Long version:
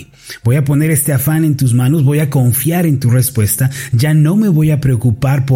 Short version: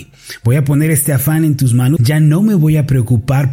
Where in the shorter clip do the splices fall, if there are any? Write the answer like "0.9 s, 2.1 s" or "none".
2.0 s